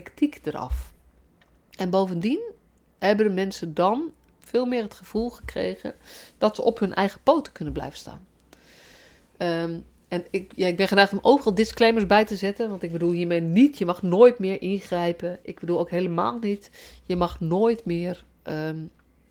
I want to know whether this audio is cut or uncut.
uncut